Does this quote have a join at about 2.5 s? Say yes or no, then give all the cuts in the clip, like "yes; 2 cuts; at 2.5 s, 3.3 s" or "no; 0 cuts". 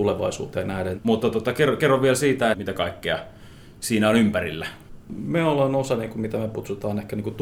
yes; 2 cuts; at 1.0 s, 2.5 s